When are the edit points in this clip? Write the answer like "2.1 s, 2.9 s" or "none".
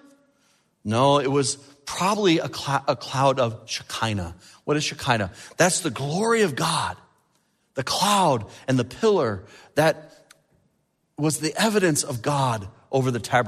none